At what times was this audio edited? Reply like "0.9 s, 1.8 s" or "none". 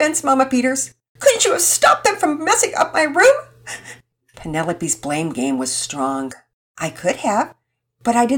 1.2 s